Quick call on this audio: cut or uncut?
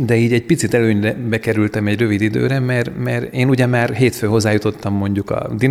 uncut